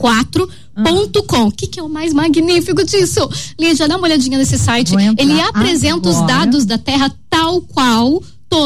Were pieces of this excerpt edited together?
no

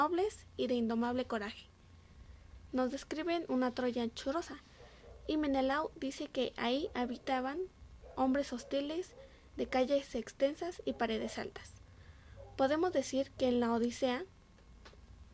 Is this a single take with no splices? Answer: no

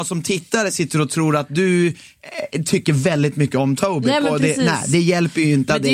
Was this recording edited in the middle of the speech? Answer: no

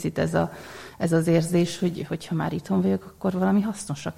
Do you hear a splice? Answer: no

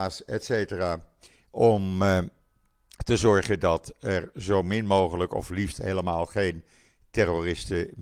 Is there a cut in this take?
no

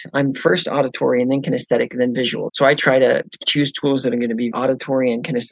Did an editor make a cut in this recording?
yes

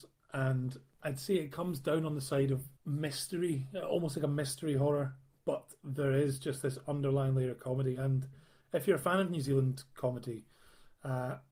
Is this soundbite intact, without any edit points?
no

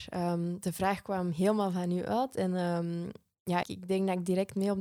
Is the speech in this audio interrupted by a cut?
yes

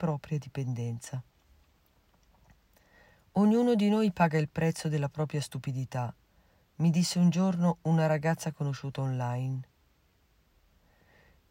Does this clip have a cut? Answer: no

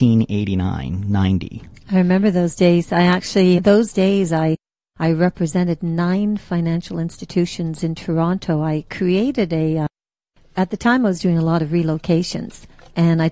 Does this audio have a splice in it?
yes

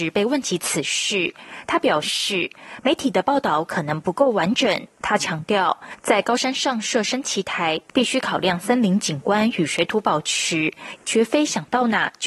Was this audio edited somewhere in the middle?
yes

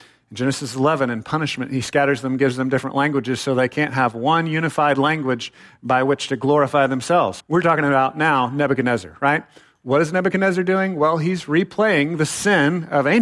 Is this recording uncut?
no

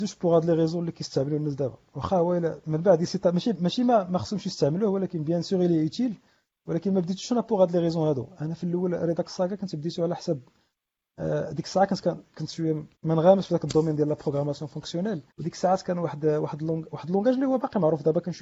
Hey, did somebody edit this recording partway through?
yes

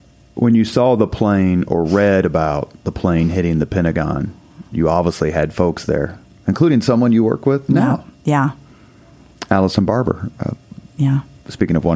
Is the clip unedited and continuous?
yes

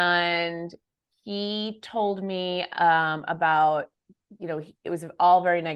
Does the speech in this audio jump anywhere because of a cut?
no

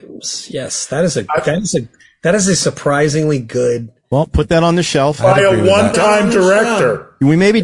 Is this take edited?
no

